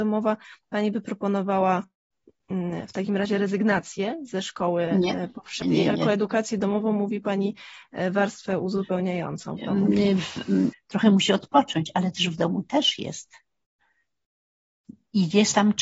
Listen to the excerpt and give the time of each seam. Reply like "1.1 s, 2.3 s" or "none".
5.6 s, 10.7 s